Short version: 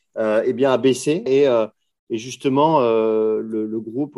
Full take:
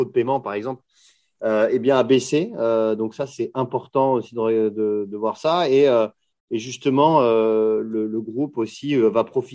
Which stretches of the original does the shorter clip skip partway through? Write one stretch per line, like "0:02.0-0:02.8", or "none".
0:02.5-0:05.7

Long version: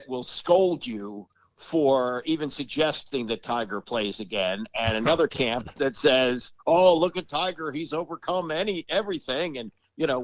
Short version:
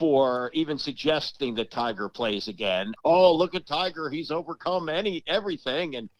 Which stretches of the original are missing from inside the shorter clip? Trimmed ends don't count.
0:04.7-0:06.6

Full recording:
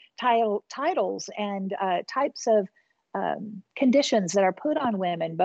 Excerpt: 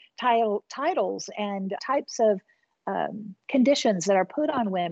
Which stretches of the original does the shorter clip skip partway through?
0:01.8-0:02.0

